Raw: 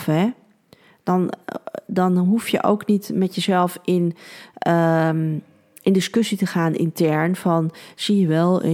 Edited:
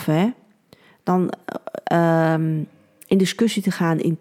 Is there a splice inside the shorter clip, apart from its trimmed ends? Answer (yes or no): yes